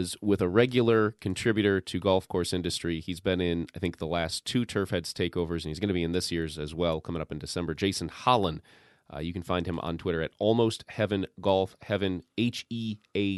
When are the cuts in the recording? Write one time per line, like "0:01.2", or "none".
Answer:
none